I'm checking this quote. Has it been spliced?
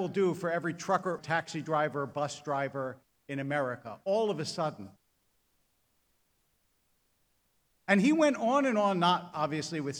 yes; 1 cut; at 1.2 s

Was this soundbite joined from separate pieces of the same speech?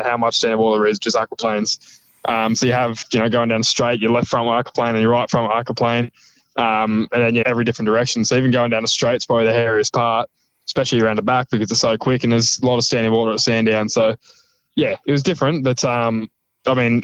yes; 1 cut; at 7.4 s

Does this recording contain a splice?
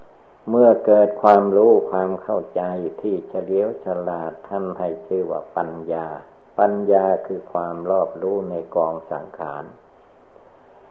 no; 0 cuts

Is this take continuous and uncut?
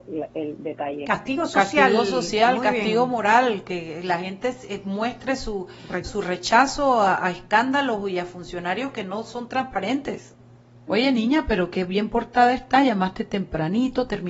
no; 2 cuts; at 6.0 s, 10.9 s

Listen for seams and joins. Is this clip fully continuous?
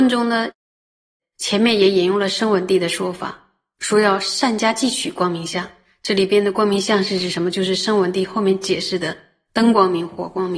yes; 0 cuts

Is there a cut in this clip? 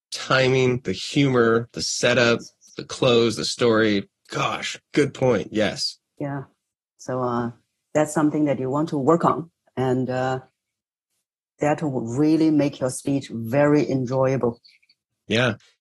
no; 0 cuts

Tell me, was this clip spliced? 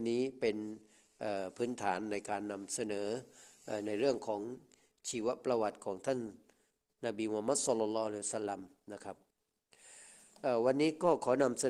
no; 0 cuts

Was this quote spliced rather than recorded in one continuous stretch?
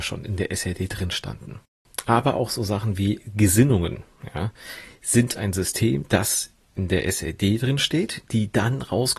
no; 0 cuts

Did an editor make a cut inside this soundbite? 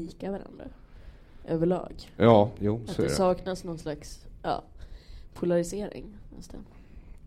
no; 0 cuts

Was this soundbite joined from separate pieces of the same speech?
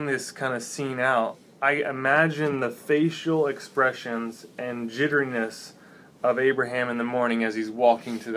no; 0 cuts

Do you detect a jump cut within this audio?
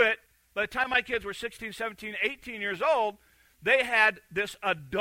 no; 0 cuts

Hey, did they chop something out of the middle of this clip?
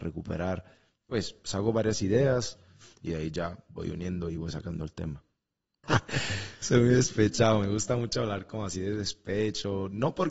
yes; 1 cut; at 5.8 s

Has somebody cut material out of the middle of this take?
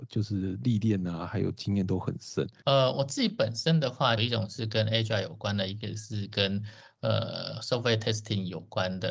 yes; 2 cuts; at 2.6 s, 4.2 s

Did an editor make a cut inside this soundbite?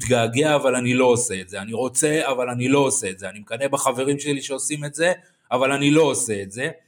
no; 0 cuts

